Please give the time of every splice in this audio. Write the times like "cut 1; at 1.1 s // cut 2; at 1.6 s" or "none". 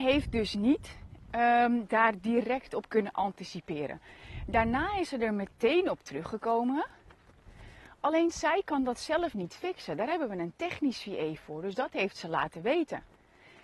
none